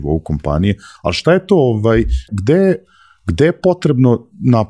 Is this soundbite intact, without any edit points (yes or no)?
no